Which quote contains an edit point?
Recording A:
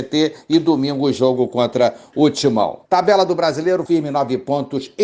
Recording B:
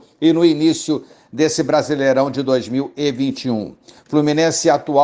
A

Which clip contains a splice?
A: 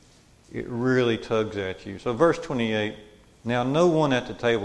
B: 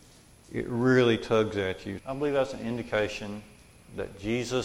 B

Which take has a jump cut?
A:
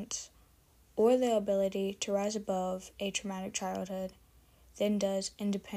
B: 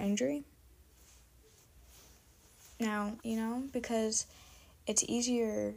B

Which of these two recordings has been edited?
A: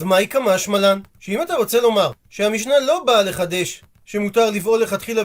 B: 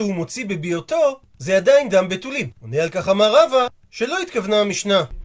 B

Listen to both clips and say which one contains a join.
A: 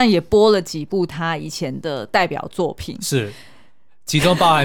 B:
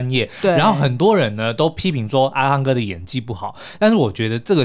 A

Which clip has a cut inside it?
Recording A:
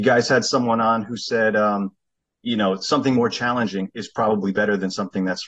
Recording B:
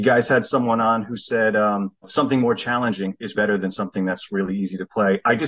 B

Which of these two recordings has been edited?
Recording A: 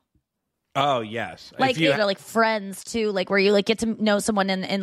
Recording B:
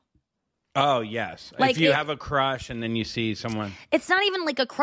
A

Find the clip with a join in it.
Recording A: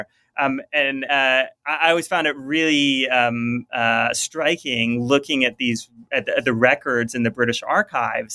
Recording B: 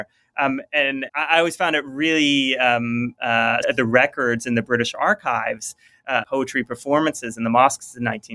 B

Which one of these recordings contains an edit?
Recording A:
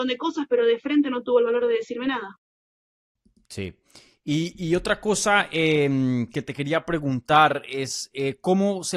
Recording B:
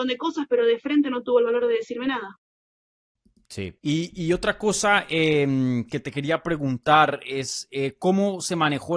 B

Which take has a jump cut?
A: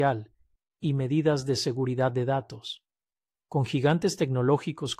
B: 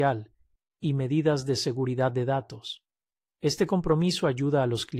A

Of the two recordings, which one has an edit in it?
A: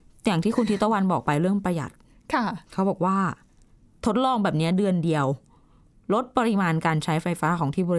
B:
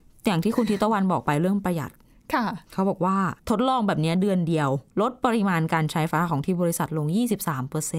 B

